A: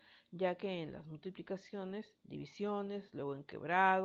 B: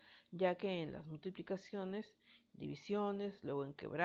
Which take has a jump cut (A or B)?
A